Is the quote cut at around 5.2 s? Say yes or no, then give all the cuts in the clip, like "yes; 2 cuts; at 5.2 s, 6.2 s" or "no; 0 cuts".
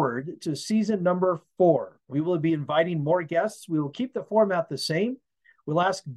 no; 1 cut; at 2.0 s